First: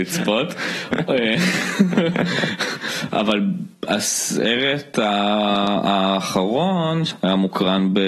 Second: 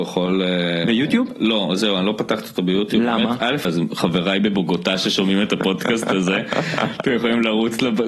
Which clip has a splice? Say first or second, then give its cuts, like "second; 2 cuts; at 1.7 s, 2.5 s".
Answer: second; 1 cut; at 3.7 s